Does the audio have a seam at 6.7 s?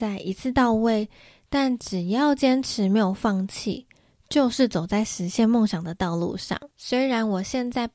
yes; 1 cut; at 6.7 s

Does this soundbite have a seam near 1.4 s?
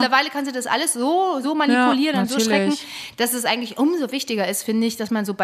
no; 0 cuts

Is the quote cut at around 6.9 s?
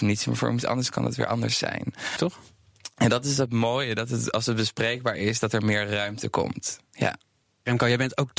no; 1 cut; at 2.2 s

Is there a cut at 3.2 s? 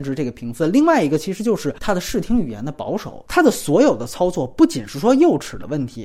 no; 0 cuts

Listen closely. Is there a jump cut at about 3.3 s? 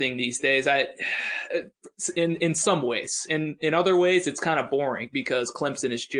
no; 0 cuts

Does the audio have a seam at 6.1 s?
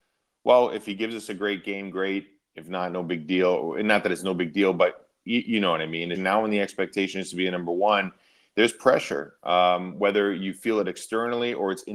yes; 1 cut; at 6.1 s

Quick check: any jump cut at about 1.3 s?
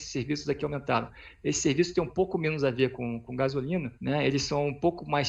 no; 1 cut; at 4.0 s

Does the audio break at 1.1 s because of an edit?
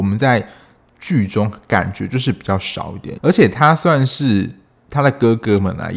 no; 1 cut; at 3.2 s

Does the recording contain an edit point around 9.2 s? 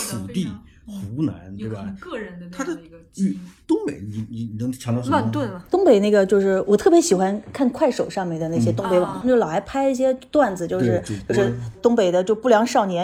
yes; 1 cut; at 9.2 s

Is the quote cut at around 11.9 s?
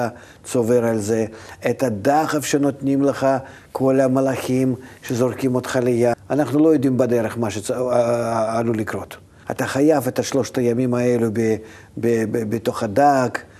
no; 2 cuts; at 6.1 s, 9.4 s

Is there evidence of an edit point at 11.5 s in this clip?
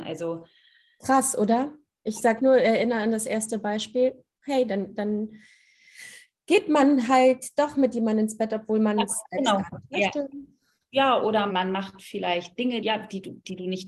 yes; 2 cuts; at 11.5 s, 12.8 s

